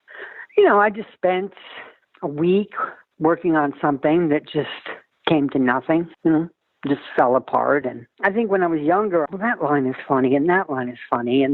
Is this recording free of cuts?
no; 3 cuts; at 6.1 s, 7.8 s, 9.3 s

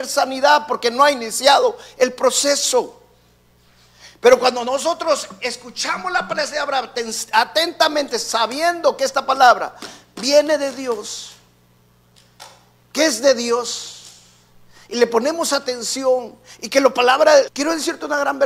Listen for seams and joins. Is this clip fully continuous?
no; 1 cut; at 17.5 s

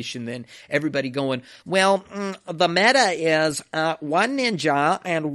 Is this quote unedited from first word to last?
yes; 0 cuts

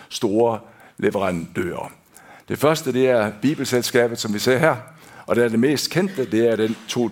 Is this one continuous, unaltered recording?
yes; 0 cuts

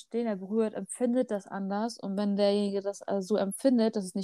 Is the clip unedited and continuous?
yes; 0 cuts

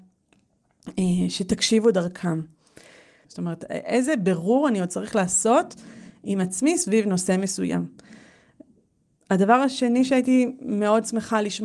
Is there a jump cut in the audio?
yes; 1 cut; at 3.2 s

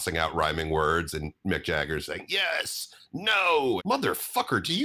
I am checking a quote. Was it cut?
yes; 1 cut; at 3.8 s

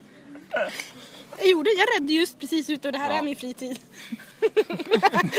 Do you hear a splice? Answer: no; 0 cuts

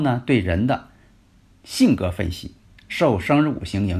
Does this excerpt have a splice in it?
yes; 1 cut; at 2.7 s

